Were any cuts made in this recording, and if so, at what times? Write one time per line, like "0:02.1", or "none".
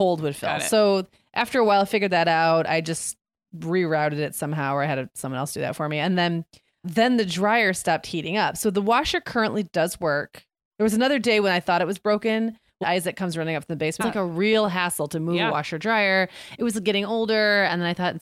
0:06.8
0:12.8
0:14.0